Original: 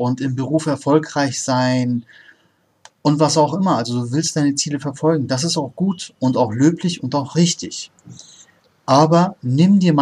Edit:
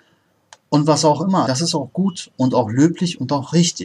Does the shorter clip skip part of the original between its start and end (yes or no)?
yes